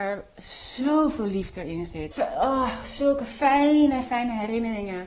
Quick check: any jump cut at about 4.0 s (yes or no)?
yes